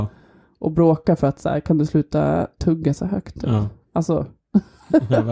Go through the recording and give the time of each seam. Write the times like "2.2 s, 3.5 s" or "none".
none